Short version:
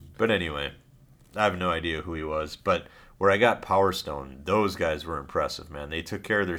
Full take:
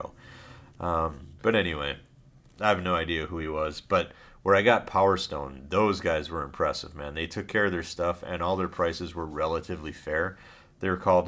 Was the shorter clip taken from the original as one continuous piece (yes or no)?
yes